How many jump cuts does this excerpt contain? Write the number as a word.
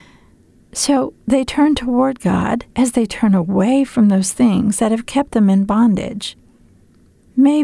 one